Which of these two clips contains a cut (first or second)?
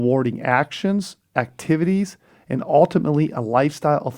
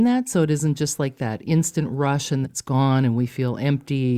second